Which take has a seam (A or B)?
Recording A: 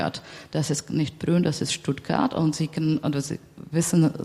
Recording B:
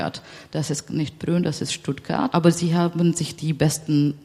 B